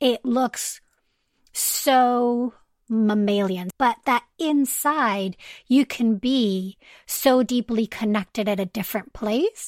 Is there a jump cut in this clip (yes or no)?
yes